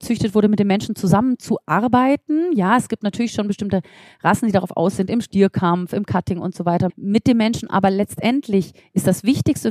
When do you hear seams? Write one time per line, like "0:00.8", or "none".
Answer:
0:06.9